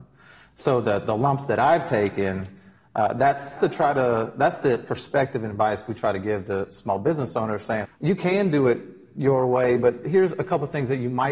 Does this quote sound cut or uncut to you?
cut